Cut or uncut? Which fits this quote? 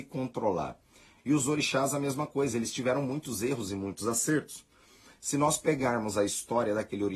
cut